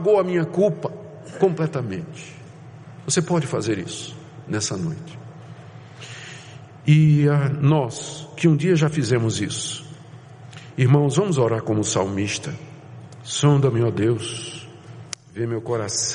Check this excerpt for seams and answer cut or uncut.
uncut